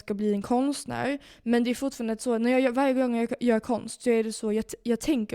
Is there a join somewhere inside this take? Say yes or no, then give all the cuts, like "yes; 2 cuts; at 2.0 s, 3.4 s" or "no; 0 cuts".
no; 0 cuts